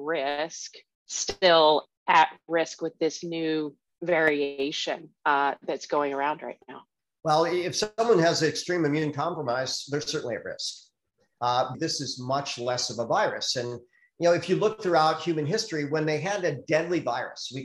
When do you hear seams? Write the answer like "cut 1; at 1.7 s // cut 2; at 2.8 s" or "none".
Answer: cut 1; at 11.7 s

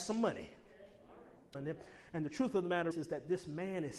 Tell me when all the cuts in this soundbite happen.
cut 1; at 1.5 s // cut 2; at 2.9 s

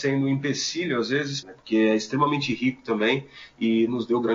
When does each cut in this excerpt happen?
cut 1; at 1.4 s

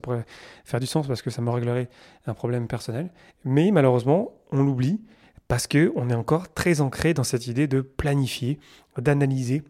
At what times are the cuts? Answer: cut 1; at 3.3 s

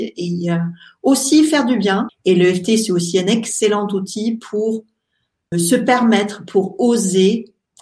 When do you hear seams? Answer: cut 1; at 2.1 s // cut 2; at 5.5 s

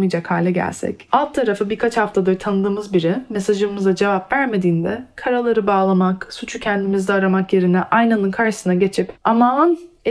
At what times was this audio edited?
cut 1; at 9.2 s

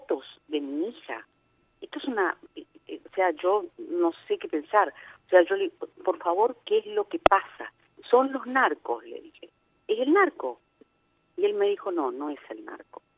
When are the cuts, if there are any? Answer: cut 1; at 8.0 s

